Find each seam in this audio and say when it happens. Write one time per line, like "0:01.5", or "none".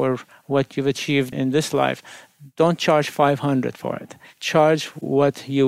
0:01.3